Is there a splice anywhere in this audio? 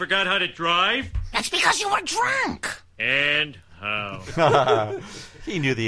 no; 0 cuts

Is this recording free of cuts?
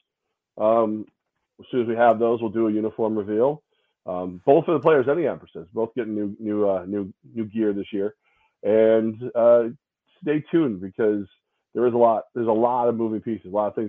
yes; 0 cuts

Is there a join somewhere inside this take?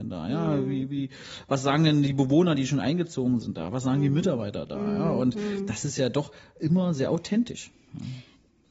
no; 0 cuts

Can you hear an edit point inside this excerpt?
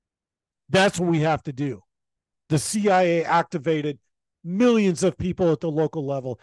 yes; 1 cut; at 2.3 s

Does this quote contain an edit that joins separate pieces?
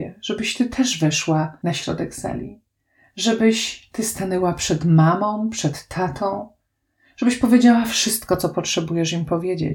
no; 0 cuts

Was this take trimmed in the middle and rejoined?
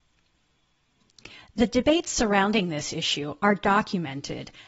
no; 0 cuts

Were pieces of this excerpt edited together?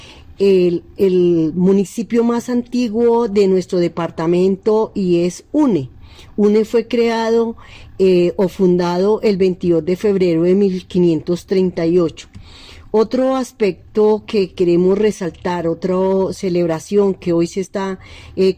no; 0 cuts

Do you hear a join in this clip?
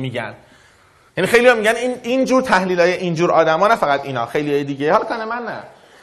no; 0 cuts

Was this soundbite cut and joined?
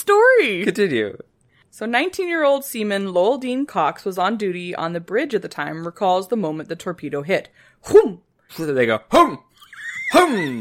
yes; 1 cut; at 8.5 s

